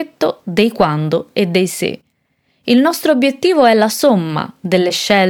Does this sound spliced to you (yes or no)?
no